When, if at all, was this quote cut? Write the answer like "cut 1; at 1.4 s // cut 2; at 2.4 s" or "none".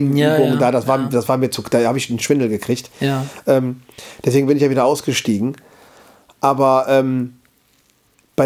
none